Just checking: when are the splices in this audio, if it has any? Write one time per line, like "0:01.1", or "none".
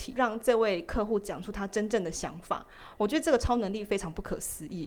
none